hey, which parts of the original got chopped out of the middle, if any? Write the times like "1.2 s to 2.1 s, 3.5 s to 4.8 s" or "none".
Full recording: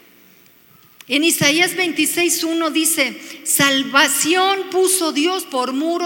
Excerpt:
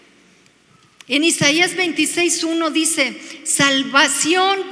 none